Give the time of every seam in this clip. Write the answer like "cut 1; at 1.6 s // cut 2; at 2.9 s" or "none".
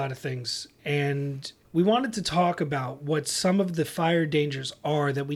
none